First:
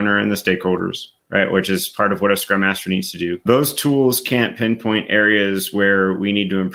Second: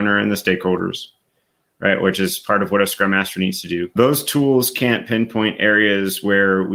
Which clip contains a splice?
first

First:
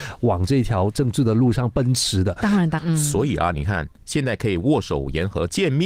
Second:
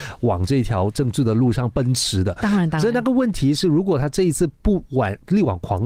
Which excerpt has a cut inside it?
first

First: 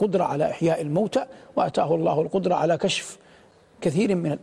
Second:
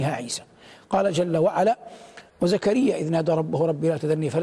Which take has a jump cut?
second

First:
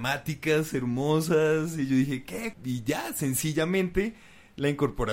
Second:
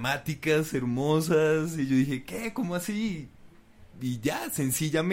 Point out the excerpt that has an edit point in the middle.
first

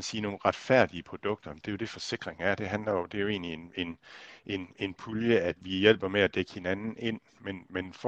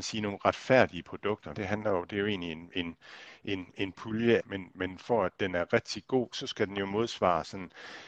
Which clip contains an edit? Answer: second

